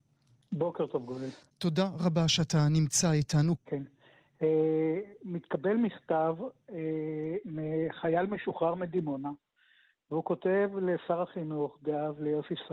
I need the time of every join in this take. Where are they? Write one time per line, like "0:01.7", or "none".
0:03.6

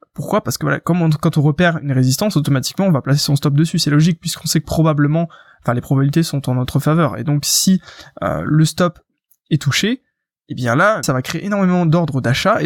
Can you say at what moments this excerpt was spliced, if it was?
0:11.0

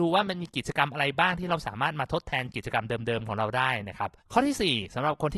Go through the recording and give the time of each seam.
0:04.2

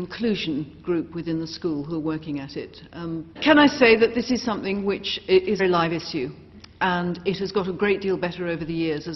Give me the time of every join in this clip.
0:03.4
0:05.6

